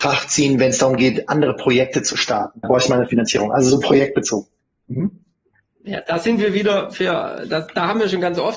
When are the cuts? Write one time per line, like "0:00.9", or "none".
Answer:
0:02.6

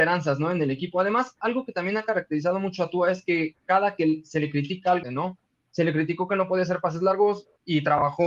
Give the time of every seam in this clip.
0:05.0

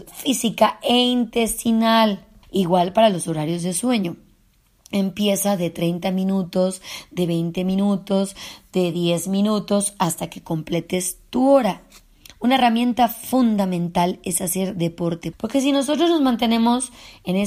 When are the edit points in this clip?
0:02.4
0:15.3

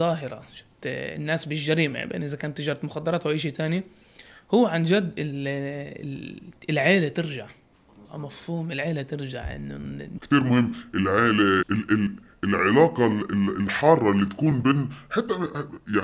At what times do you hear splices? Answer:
0:11.6

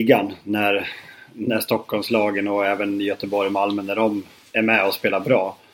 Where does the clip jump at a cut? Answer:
none

